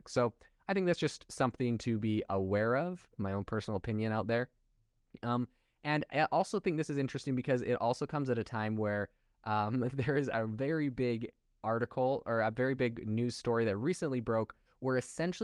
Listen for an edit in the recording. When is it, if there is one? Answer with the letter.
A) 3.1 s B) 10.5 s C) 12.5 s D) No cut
A